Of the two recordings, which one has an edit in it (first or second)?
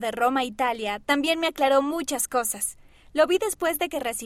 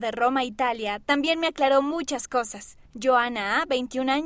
second